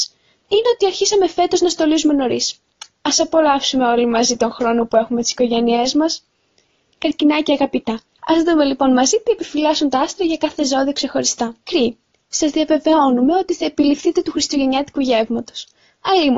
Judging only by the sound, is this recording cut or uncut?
cut